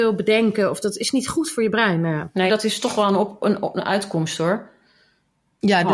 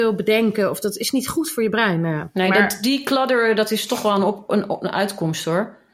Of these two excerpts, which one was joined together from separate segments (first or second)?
first